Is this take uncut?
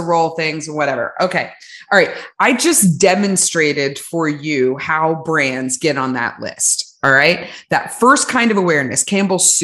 yes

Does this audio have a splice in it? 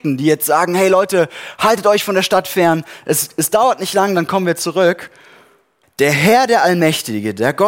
yes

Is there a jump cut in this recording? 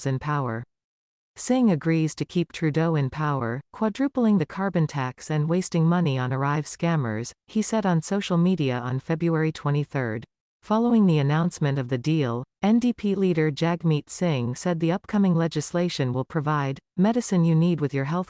yes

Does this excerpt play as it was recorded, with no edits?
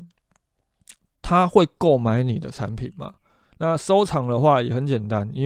no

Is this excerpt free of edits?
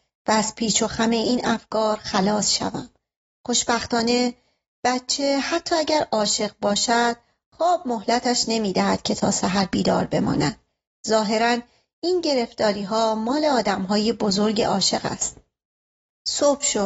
yes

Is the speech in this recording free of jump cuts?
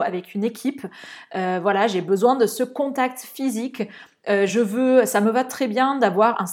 yes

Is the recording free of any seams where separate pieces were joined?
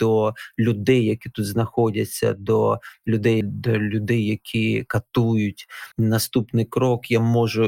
no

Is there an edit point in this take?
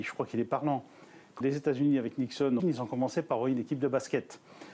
yes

